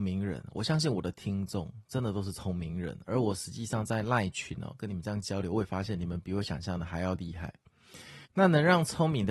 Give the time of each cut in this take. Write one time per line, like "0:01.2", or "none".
0:08.2